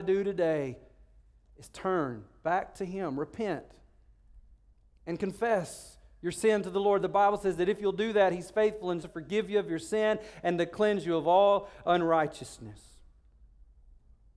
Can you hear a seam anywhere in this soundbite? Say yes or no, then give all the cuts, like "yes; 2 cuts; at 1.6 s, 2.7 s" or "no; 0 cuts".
yes; 1 cut; at 9.0 s